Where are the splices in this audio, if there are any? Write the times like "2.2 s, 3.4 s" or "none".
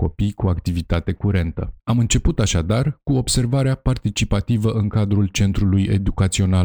1.8 s